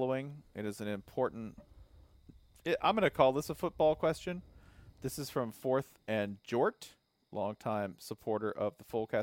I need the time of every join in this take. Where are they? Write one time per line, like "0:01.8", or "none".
none